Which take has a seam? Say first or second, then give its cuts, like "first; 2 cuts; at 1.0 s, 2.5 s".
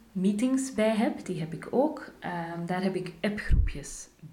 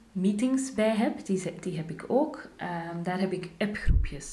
first; 1 cut; at 1.2 s